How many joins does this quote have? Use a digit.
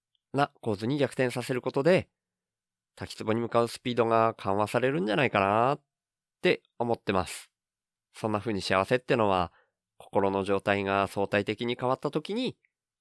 1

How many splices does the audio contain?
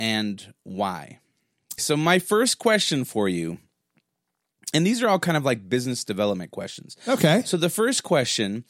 1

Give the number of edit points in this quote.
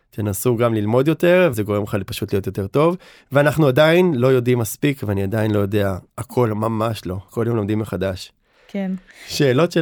3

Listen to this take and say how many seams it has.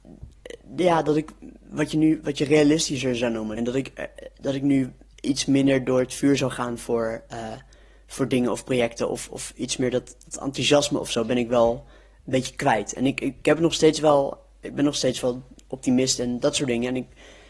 1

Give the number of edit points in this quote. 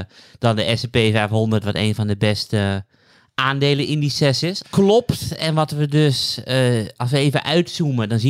1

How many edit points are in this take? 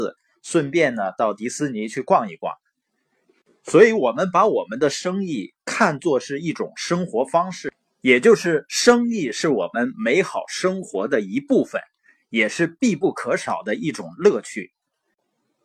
0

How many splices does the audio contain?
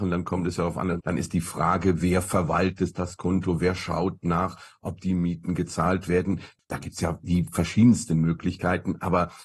1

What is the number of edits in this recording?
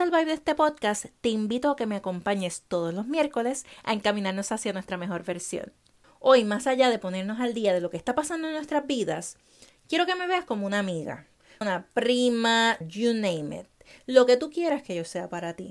2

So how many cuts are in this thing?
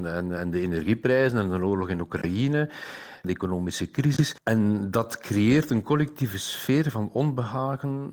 0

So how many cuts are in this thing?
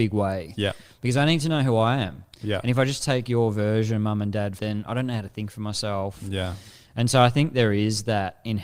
1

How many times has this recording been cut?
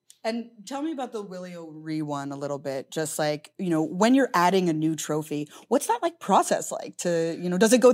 0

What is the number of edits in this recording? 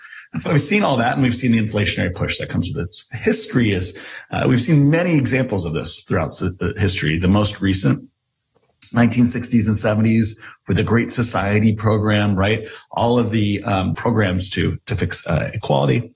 1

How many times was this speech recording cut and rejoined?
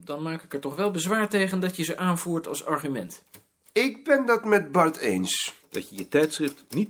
1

